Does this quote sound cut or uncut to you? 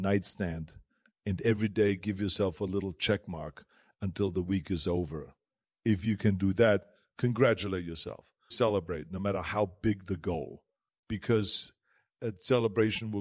cut